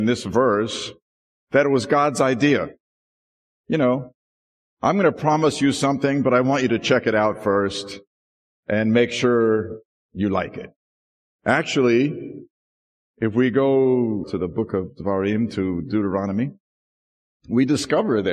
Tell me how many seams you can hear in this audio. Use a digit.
1